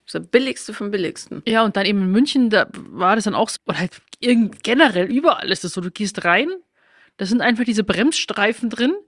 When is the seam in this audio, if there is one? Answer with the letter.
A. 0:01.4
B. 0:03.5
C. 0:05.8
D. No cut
B